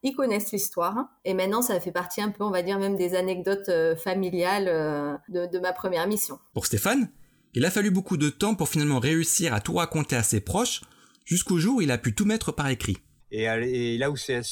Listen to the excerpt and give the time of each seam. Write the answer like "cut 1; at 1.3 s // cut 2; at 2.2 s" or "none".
cut 1; at 13.2 s